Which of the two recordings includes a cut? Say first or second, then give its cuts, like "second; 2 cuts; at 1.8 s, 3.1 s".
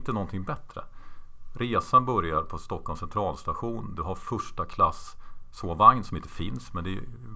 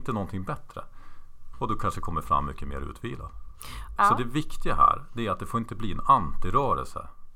second; 2 cuts; at 1.5 s, 4.0 s